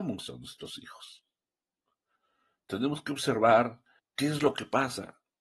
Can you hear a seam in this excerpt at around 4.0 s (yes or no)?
yes